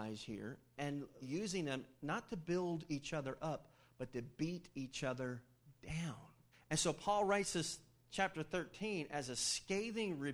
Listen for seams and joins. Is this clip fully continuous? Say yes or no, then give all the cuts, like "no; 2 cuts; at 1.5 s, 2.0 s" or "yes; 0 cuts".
no; 2 cuts; at 1.2 s, 6.5 s